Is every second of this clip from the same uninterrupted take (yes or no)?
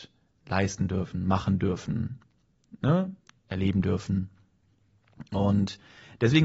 yes